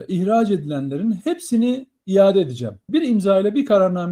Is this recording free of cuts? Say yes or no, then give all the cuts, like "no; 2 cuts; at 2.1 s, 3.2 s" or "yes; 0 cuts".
no; 1 cut; at 2.9 s